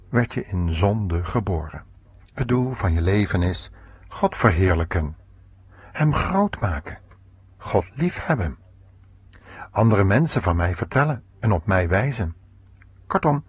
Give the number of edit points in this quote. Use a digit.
1